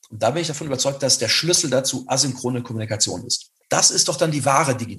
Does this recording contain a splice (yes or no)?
yes